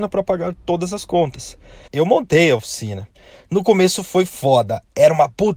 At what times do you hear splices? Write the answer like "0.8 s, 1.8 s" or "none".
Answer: 1.9 s